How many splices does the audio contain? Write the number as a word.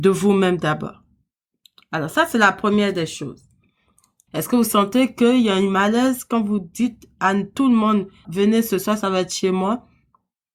two